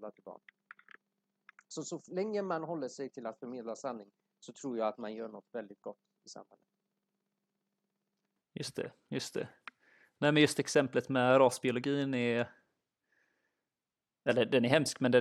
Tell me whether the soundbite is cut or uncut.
uncut